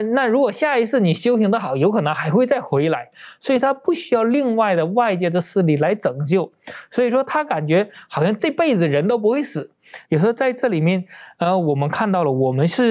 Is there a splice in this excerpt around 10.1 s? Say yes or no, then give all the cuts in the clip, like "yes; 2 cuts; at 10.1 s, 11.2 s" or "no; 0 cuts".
yes; 1 cut; at 10.1 s